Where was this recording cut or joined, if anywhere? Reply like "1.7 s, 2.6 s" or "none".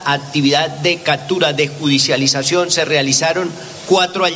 none

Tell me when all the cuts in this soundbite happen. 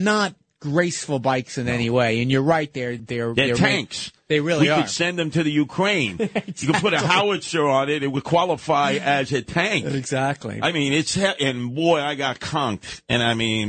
3.0 s

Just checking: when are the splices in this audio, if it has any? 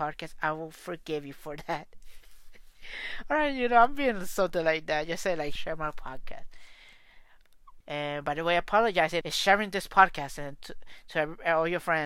5.6 s, 7.8 s, 9.2 s

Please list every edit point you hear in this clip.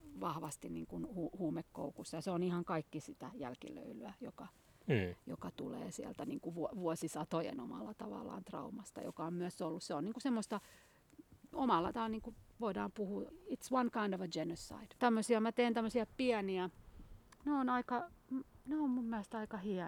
11.5 s, 13.3 s, 15.0 s

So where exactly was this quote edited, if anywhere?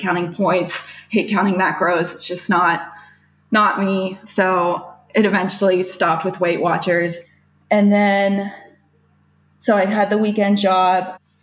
none

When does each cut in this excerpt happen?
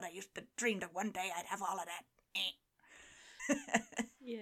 3.4 s

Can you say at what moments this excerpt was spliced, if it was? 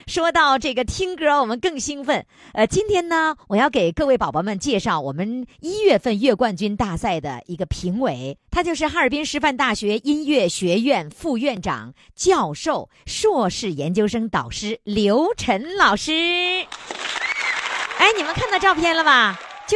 none

